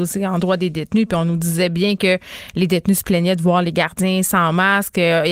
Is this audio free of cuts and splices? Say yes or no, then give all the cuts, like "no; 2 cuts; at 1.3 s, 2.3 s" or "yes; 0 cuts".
yes; 0 cuts